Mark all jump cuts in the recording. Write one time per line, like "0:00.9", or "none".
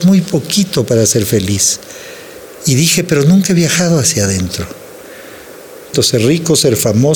0:02.6
0:05.9

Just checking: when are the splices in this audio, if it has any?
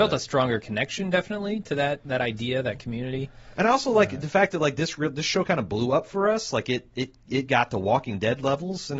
none

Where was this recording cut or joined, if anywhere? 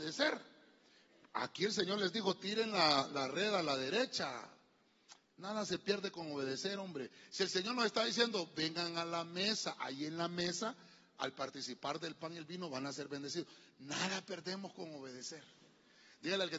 none

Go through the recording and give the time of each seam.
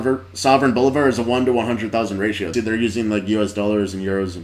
0:02.5

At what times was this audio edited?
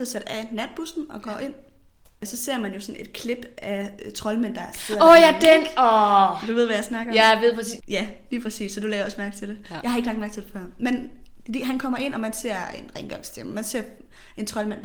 0:07.8

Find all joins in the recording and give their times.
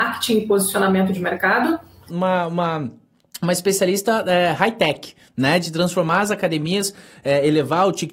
0:02.1

